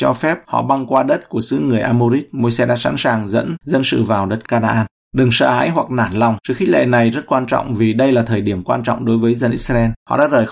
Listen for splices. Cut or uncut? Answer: uncut